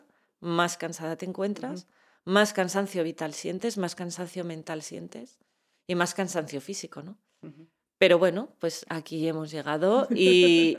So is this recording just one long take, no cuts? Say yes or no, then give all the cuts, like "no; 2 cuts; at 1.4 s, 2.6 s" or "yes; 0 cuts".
yes; 0 cuts